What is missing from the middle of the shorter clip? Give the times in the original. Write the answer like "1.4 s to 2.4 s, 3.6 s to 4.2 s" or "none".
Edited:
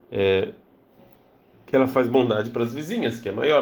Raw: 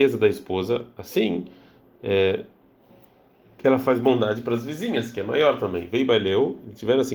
none